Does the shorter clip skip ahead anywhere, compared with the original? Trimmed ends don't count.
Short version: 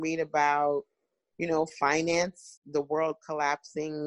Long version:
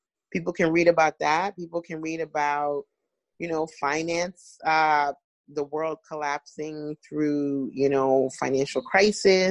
yes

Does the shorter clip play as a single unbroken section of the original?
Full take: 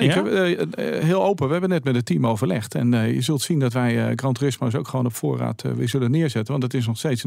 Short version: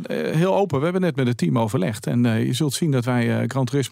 yes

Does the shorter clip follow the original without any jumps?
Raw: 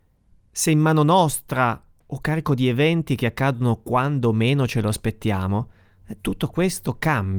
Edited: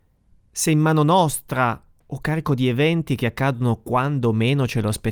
yes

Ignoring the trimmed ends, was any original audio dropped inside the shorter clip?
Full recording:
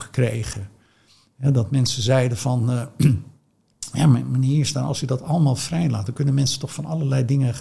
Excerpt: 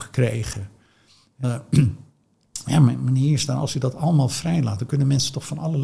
yes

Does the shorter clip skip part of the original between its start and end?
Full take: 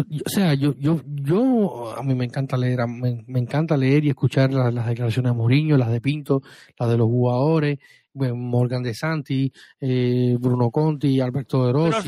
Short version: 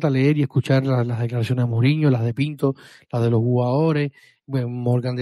no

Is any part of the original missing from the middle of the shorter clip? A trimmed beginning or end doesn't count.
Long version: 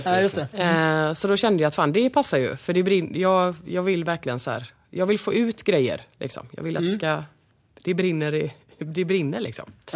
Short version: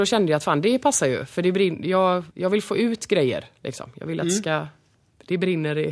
yes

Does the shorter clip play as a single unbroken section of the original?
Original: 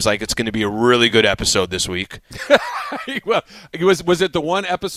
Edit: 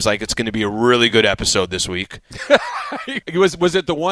no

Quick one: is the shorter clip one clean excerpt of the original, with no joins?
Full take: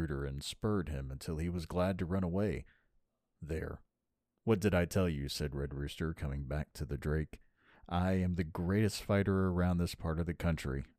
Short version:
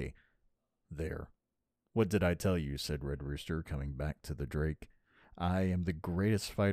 yes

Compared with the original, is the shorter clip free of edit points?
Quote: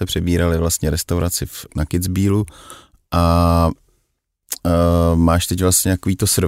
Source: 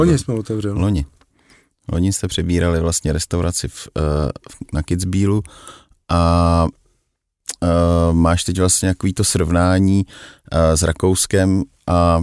no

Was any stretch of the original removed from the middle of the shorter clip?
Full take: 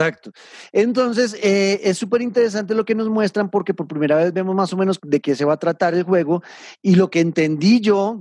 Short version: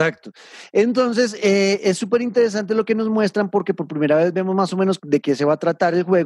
no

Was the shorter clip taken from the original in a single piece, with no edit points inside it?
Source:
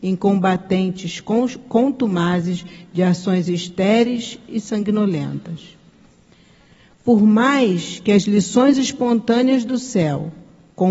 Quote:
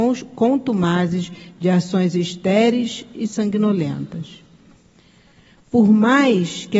yes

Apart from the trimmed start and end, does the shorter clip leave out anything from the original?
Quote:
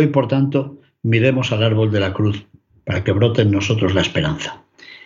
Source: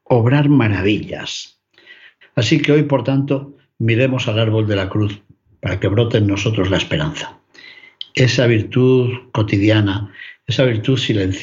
no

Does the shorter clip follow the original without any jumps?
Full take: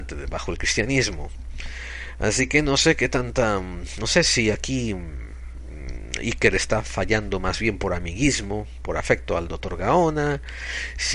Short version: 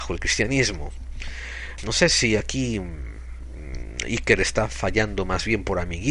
no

